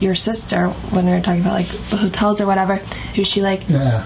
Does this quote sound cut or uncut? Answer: cut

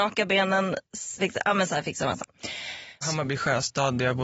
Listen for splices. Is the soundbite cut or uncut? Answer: cut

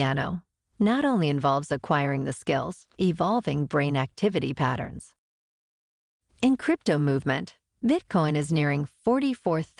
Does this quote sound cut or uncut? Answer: cut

